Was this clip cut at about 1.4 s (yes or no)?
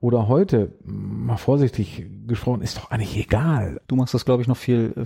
no